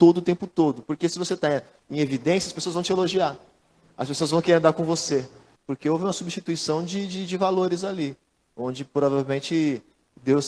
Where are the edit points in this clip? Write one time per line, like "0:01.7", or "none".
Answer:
0:05.6